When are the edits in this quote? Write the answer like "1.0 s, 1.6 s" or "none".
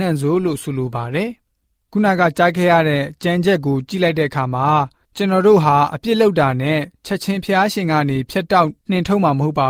none